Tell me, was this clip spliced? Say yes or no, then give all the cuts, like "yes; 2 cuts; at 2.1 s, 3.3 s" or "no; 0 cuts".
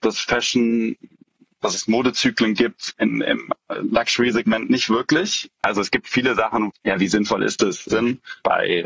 yes; 3 cuts; at 5.5 s, 6.7 s, 7.9 s